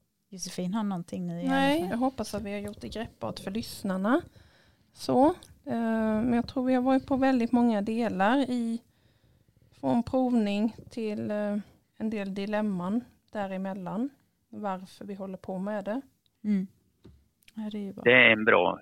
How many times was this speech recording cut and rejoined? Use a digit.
3